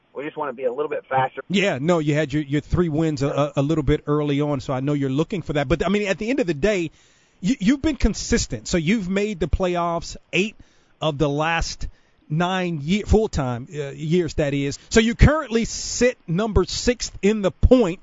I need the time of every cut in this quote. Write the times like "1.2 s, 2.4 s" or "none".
1.4 s, 14.7 s